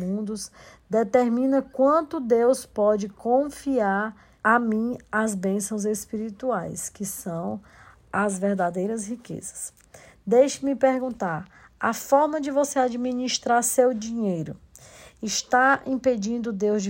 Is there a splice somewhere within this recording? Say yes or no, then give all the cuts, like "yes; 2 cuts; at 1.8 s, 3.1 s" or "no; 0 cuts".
no; 0 cuts